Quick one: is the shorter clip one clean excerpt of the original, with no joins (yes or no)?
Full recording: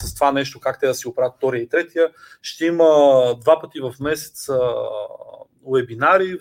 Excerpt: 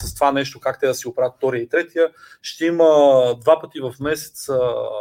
yes